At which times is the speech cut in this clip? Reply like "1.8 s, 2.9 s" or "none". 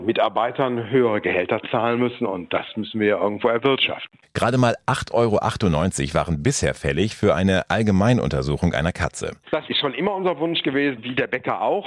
9.4 s, 11.0 s